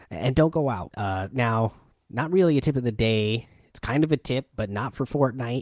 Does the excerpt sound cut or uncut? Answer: cut